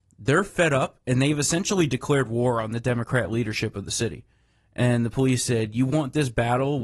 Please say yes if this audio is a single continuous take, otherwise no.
yes